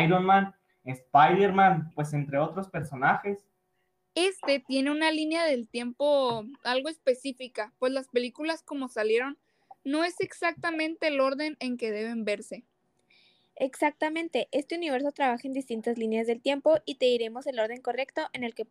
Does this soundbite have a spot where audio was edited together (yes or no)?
yes